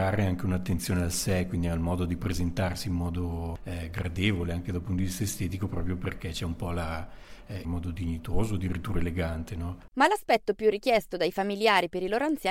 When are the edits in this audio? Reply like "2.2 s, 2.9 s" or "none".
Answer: 7.6 s, 9.9 s